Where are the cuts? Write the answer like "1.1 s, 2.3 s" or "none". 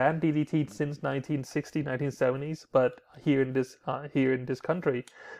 none